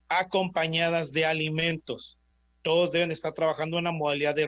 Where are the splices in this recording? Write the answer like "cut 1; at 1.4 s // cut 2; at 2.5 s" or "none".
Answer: none